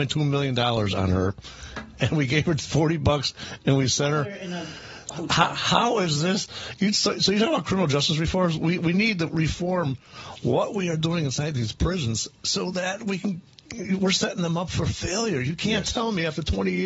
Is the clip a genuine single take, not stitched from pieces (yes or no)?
yes